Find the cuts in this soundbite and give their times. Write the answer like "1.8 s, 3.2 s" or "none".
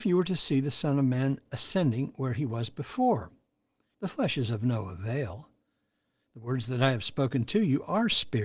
3.9 s